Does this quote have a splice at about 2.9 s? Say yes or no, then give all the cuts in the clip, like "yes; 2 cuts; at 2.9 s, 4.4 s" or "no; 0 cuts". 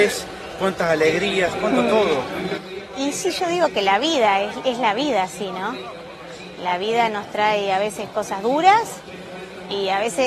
yes; 1 cut; at 2.9 s